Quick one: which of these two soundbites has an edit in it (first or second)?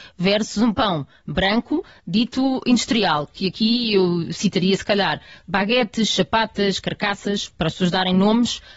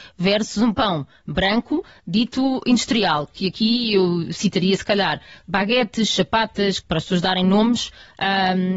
second